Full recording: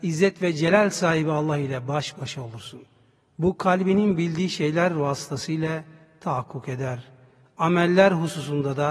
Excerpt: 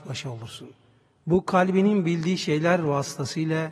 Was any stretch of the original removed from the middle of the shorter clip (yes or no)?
no